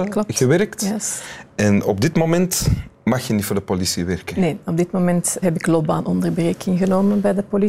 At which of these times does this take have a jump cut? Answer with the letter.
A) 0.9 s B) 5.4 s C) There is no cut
B